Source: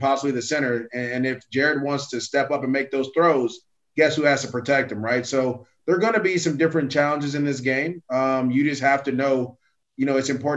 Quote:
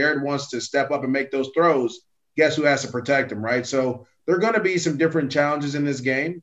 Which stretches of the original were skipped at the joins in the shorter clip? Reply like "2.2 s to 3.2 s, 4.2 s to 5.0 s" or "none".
none